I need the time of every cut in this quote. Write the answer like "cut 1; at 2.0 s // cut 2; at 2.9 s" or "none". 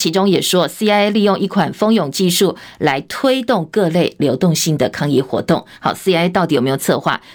none